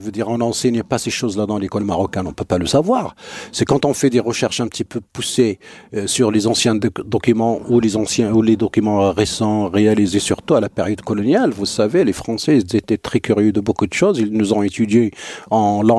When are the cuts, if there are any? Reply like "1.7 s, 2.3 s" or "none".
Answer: none